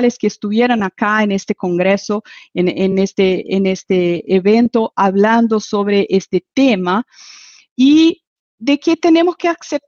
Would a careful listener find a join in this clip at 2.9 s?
no; 0 cuts

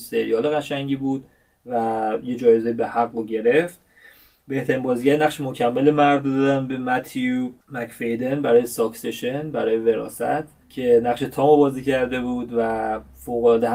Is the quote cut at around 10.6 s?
yes; 2 cuts; at 7.6 s, 10.6 s

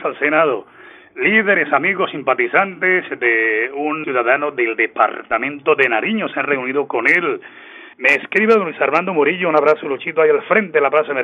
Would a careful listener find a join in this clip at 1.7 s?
no; 2 cuts; at 4.0 s, 7.9 s

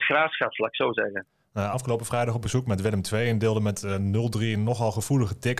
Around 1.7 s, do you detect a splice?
yes; 1 cut; at 1.7 s

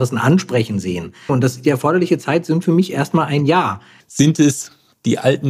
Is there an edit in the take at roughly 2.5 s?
no; 2 cuts; at 1.3 s, 4.0 s

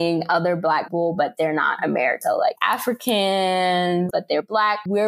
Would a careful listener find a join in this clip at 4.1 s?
yes; 1 cut; at 4.1 s

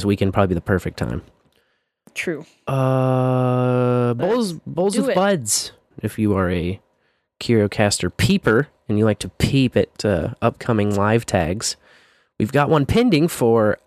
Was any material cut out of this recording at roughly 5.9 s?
yes; 1 cut; at 5.9 s

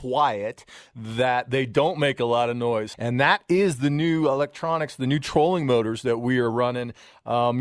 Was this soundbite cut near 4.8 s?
no; 1 cut; at 2.9 s

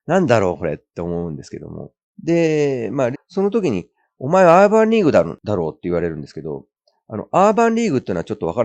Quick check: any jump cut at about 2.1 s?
yes; 2 cuts; at 2.1 s, 3.1 s

